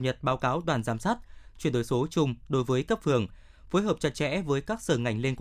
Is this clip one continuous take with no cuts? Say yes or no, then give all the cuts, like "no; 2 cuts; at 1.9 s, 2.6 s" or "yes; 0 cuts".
no; 1 cut; at 1.5 s